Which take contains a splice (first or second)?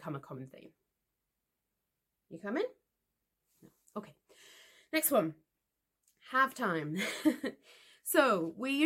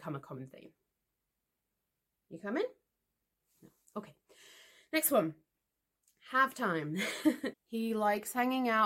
second